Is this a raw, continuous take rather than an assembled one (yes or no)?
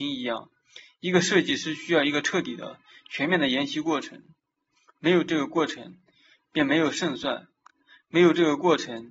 yes